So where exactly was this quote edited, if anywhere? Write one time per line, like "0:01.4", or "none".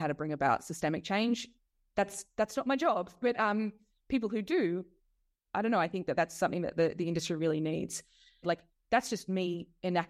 0:08.4